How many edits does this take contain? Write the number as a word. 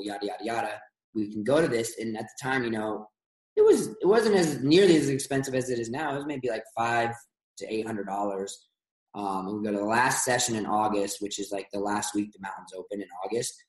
zero